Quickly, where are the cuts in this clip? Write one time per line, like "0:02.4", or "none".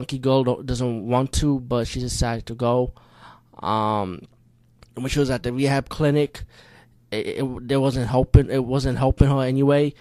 none